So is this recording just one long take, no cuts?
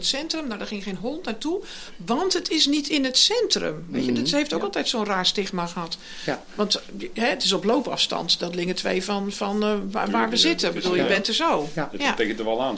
yes; 0 cuts

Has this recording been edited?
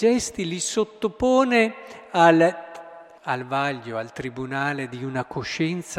yes; 1 cut; at 3.2 s

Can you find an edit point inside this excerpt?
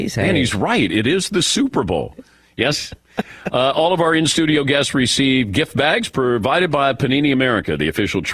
no; 0 cuts

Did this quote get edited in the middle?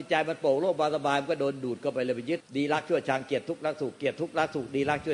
yes; 1 cut; at 2.4 s

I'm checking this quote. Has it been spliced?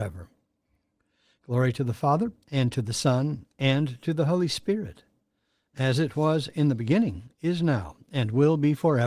no; 0 cuts

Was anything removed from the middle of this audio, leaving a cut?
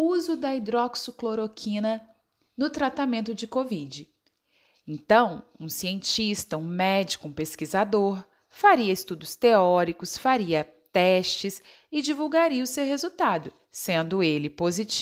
no; 0 cuts

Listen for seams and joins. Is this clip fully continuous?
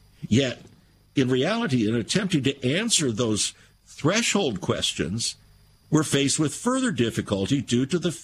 yes; 0 cuts

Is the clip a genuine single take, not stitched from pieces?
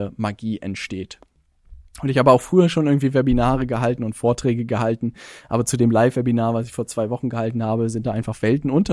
yes; 0 cuts

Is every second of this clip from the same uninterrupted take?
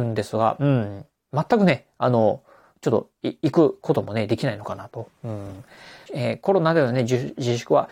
no; 1 cut; at 6.1 s

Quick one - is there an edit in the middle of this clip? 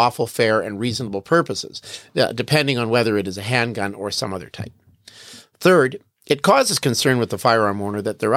no; 0 cuts

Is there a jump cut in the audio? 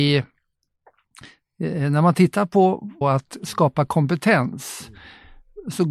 yes; 1 cut; at 3.0 s

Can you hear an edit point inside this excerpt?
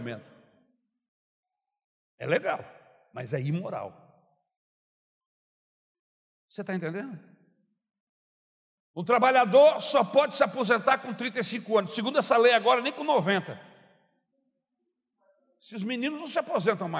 no; 0 cuts

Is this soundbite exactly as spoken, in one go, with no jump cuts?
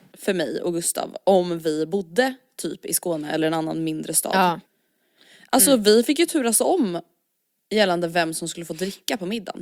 yes; 0 cuts

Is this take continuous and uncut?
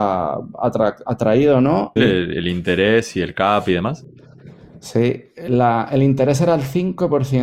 no; 1 cut; at 2.0 s

